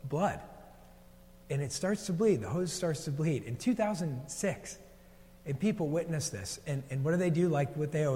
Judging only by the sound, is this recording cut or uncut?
uncut